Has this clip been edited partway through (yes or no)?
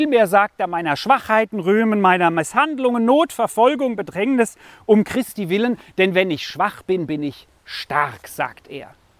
no